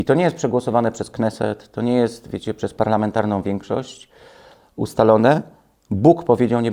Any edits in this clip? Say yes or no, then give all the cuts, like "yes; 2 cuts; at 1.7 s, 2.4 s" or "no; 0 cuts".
no; 0 cuts